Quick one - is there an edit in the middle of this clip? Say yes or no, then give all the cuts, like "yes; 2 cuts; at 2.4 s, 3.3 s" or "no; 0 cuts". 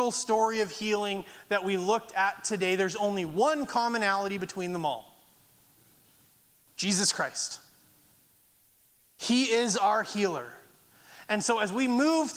no; 0 cuts